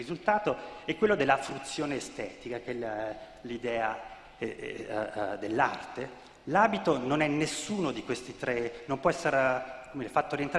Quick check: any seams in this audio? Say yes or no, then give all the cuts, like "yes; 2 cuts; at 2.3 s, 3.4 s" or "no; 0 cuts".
no; 0 cuts